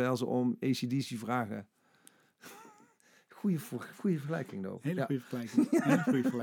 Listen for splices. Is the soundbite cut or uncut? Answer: uncut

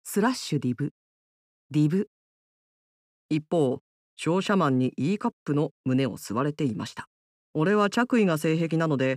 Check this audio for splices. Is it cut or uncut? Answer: cut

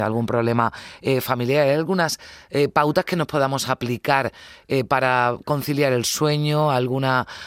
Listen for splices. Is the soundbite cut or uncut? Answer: uncut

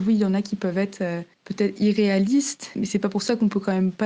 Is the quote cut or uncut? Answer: cut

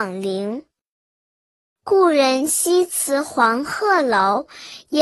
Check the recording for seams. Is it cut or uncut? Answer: uncut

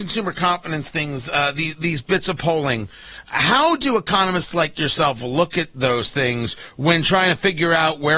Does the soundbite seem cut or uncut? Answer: uncut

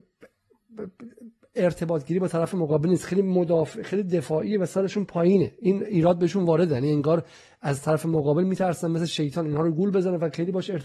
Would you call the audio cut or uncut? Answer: uncut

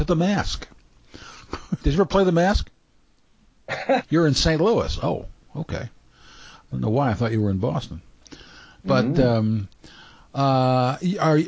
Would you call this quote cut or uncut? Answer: cut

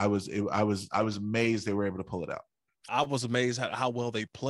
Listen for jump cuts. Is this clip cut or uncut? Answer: cut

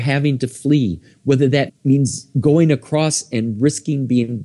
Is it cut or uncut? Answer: cut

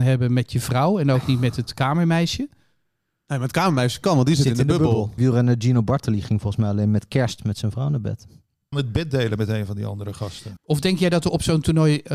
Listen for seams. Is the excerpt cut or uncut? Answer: cut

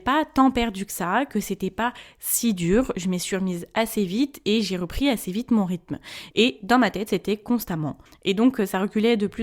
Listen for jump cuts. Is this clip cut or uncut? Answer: cut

